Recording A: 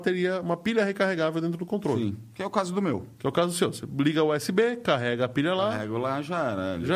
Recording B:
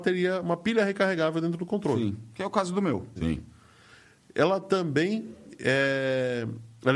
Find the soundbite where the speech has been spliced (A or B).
B